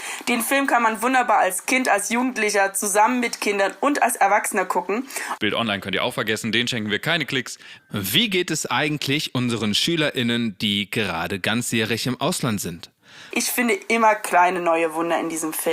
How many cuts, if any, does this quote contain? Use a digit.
3